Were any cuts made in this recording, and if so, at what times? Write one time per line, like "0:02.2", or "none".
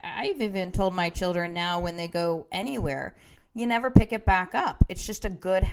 0:03.4

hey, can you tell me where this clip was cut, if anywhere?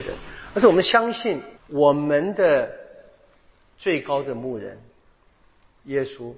0:01.5

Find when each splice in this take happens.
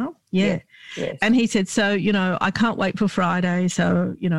none

